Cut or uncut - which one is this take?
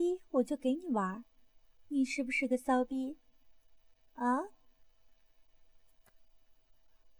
uncut